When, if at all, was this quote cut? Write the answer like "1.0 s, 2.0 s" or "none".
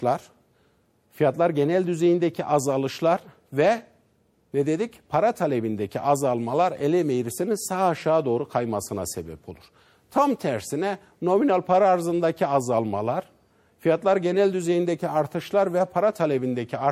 none